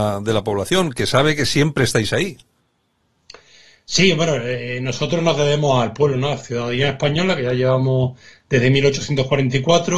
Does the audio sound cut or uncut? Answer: uncut